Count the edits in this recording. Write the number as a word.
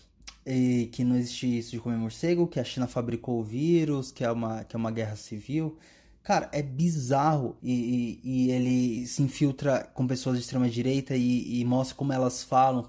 one